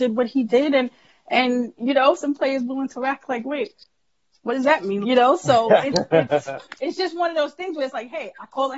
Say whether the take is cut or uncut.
cut